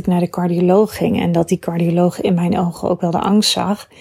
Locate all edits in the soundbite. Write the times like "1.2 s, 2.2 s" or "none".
none